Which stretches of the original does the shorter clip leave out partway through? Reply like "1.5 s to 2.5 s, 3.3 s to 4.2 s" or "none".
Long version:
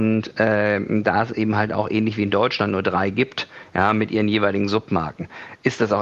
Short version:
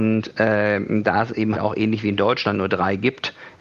1.5 s to 1.7 s